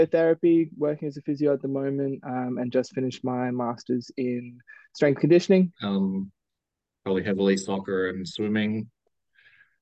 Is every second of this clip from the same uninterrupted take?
no; 1 cut; at 5.7 s

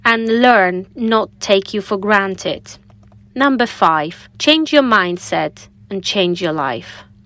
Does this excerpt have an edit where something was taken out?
yes; 2 cuts; at 3.2 s, 4.3 s

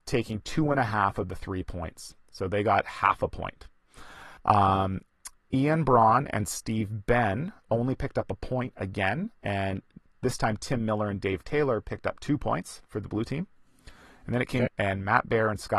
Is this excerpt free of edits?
no; 3 cuts; at 4.4 s, 7.6 s, 14.7 s

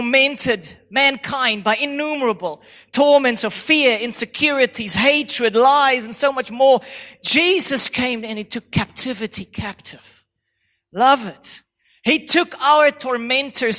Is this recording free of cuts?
yes; 0 cuts

